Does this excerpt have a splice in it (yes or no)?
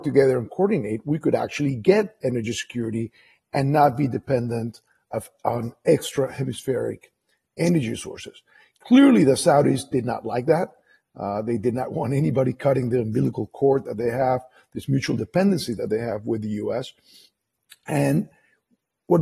no